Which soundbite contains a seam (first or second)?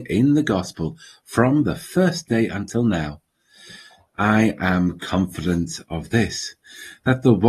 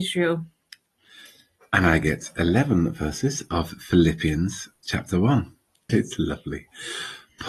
second